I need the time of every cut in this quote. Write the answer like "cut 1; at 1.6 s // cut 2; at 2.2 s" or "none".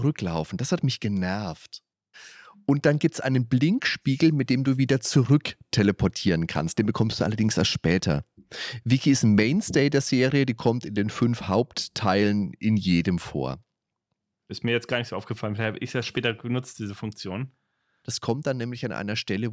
cut 1; at 2.1 s // cut 2; at 14.5 s // cut 3; at 18.0 s